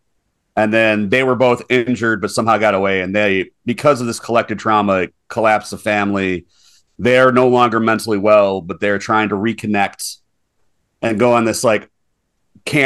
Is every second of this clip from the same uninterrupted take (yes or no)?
yes